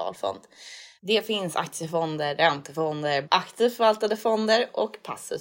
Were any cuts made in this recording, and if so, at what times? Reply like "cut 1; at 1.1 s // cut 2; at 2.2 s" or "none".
cut 1; at 1.0 s // cut 2; at 3.2 s